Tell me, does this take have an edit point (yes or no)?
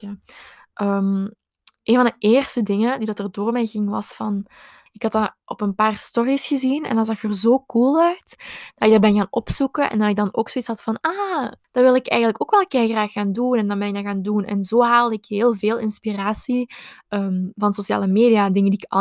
yes